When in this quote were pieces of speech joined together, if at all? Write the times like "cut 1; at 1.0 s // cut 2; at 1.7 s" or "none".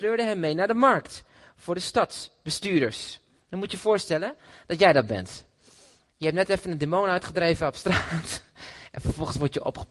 none